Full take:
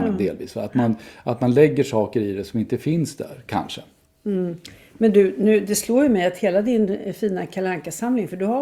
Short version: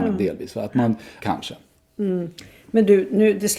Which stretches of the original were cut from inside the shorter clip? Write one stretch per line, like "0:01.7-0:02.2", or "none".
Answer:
0:01.2-0:03.4